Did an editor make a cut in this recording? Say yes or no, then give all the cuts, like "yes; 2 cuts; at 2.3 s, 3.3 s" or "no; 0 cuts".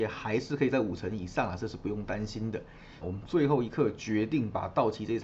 yes; 1 cut; at 3.0 s